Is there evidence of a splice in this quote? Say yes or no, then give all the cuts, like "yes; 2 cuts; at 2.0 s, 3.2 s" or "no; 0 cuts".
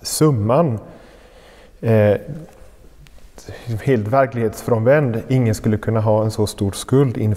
no; 0 cuts